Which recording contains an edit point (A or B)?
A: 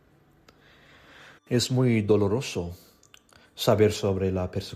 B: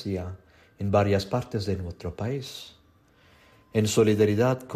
A